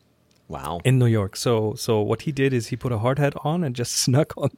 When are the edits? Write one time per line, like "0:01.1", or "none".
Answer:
none